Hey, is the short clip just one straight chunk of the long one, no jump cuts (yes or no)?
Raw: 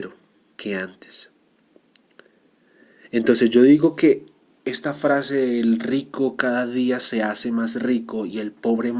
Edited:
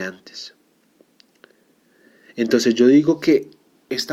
yes